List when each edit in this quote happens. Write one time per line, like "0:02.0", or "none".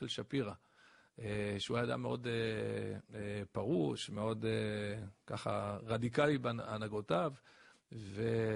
none

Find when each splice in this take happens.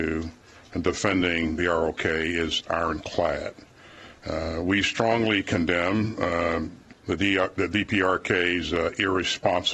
0:07.0

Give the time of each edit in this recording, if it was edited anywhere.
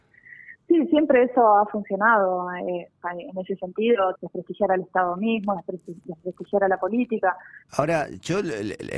0:04.1
0:07.7

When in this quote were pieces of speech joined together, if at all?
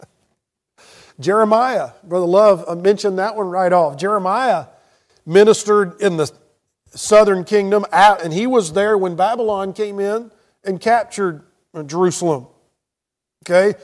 0:08.2

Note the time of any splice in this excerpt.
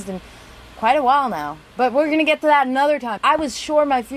0:01.7
0:03.2

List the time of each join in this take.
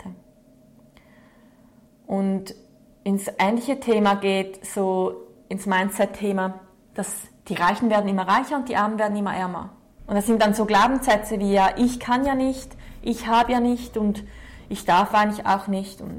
0:10.0

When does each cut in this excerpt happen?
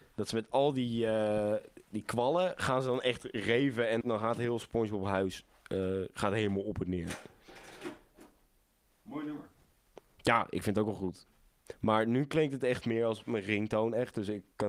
0:04.0

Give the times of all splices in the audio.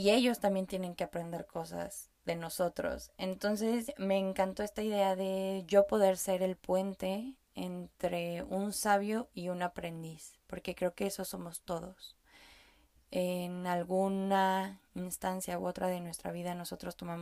none

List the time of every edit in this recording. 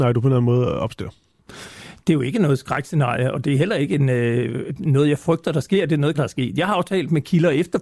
0:06.1

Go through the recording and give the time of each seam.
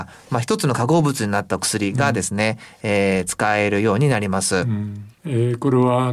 none

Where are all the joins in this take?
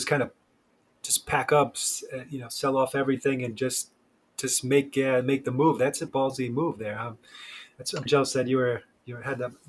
0:06.1
0:08.1

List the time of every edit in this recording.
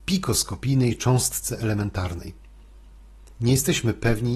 none

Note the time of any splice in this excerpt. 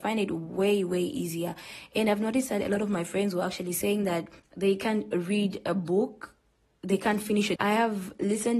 0:07.6

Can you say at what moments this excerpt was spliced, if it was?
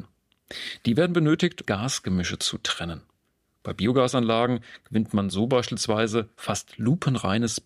0:01.7

